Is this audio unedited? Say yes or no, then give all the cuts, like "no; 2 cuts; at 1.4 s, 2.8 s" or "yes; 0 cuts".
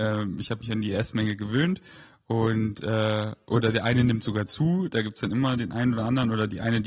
yes; 0 cuts